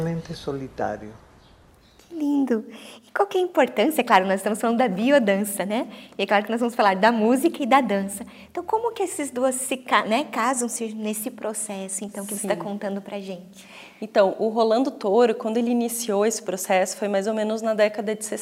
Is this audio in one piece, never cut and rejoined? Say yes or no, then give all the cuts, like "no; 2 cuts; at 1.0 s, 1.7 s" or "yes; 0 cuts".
yes; 0 cuts